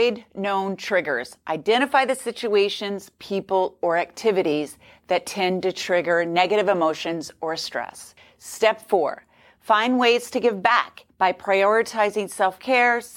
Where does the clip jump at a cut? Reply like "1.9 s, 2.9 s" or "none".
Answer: 11.1 s